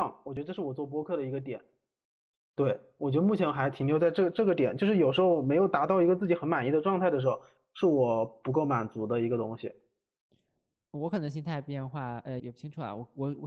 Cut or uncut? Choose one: cut